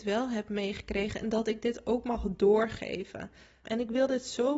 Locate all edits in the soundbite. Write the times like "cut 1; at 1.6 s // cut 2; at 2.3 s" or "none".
cut 1; at 3.6 s

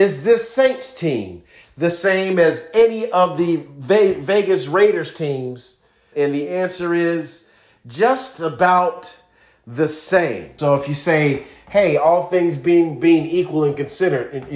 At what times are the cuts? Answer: cut 1; at 6.1 s // cut 2; at 10.6 s

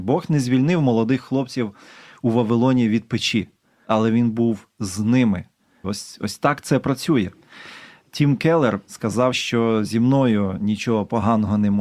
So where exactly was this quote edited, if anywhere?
cut 1; at 5.8 s // cut 2; at 9.3 s

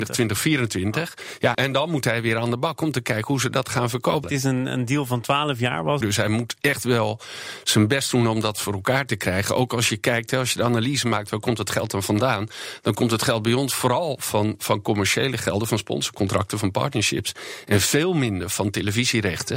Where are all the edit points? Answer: cut 1; at 1.5 s // cut 2; at 4.2 s // cut 3; at 6.0 s

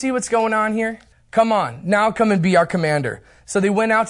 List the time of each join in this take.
cut 1; at 1.1 s

